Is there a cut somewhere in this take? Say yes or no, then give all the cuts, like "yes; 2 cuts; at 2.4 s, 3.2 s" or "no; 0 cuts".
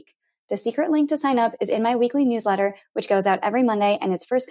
no; 0 cuts